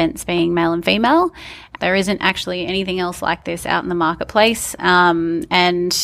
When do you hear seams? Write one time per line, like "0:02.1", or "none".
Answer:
0:01.8